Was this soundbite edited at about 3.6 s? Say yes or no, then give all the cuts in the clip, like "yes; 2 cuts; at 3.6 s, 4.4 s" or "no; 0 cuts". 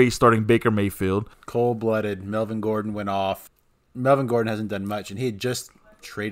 no; 1 cut; at 1.3 s